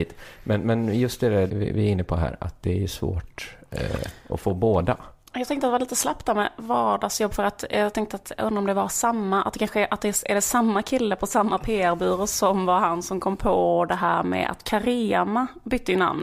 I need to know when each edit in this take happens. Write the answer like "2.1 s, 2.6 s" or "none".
1.5 s